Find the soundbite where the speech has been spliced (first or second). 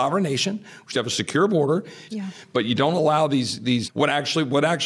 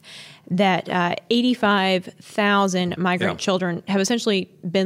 first